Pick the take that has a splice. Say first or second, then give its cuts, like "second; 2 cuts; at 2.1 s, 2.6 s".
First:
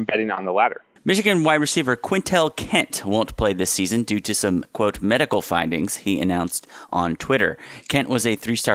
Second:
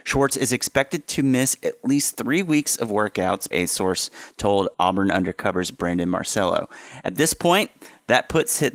second; 1 cut; at 3.5 s